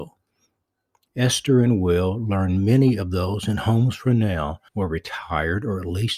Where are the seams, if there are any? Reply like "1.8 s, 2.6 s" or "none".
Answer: 1.1 s, 4.7 s

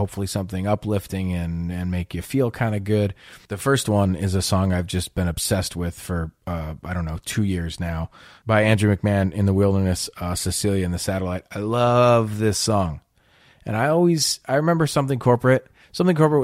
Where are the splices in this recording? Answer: none

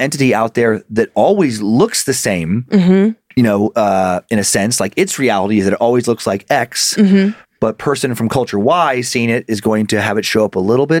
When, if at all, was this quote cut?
none

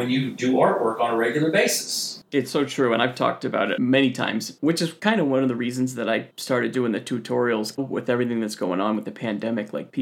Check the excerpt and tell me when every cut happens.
7.8 s

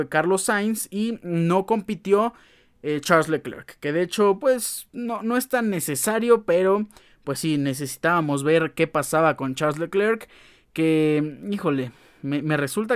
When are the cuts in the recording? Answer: none

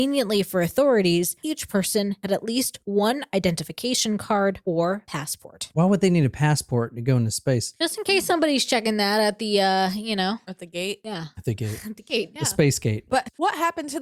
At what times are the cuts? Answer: none

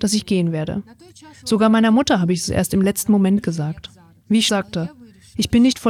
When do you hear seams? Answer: 4.5 s

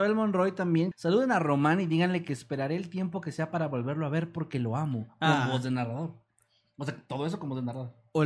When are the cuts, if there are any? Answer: 0.9 s

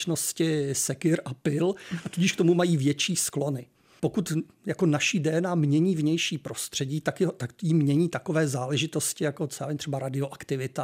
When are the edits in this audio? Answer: 4.0 s

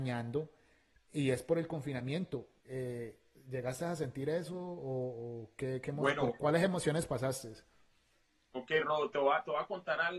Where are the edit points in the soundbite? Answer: 2.6 s

